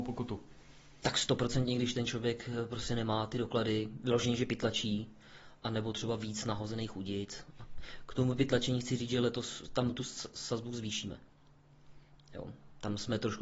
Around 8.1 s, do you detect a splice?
no; 0 cuts

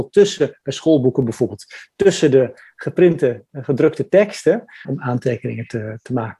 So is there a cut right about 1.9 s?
no; 1 cut; at 4.8 s

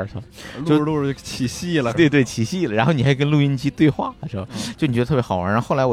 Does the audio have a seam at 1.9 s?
yes; 1 cut; at 1.9 s

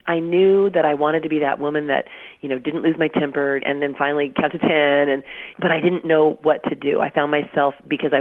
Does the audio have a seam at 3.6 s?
yes; 2 cuts; at 3.6 s, 5.5 s

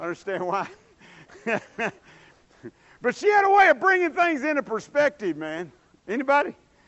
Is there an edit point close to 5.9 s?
yes; 1 cut; at 5.9 s

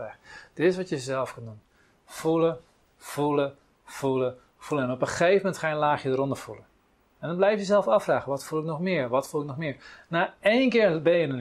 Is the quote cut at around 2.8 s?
no; 0 cuts

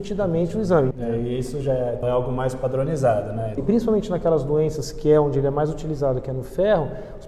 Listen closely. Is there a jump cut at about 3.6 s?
yes; 3 cuts; at 0.9 s, 2.0 s, 3.6 s

